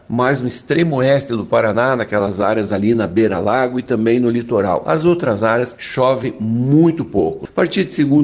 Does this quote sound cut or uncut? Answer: uncut